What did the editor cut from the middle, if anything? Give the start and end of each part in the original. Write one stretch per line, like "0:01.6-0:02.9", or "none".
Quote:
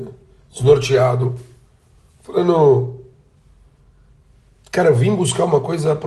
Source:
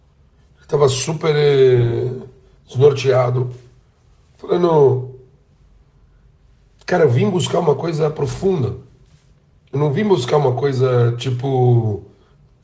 none